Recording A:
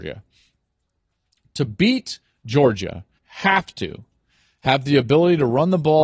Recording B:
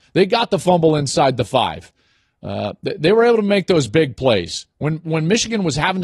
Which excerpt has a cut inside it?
A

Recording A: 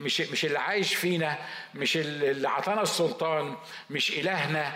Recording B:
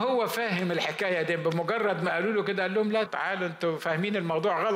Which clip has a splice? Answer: B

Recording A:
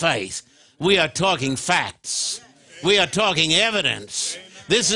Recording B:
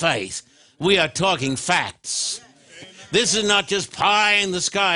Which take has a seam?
B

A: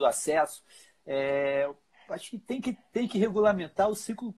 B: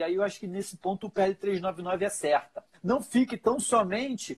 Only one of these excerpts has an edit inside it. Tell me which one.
B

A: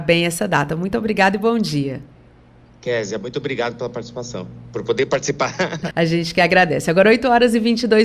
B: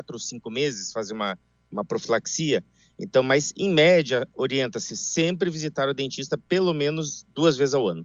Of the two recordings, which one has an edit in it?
A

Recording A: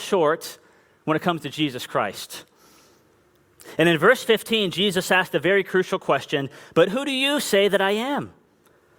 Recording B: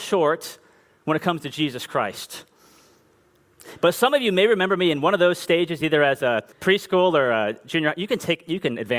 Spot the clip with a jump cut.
B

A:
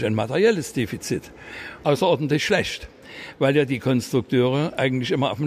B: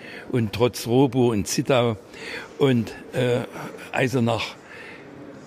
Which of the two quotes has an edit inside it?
A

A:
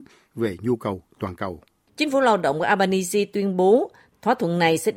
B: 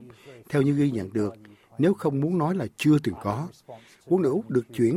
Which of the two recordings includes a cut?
A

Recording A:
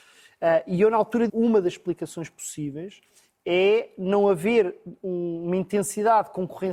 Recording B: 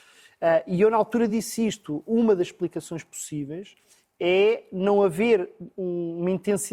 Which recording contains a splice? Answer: A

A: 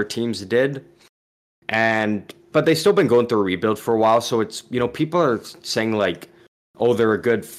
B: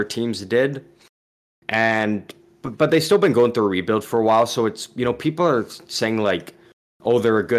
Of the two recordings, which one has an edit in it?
A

